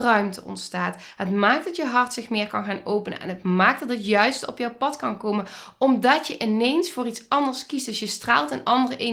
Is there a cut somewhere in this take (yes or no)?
no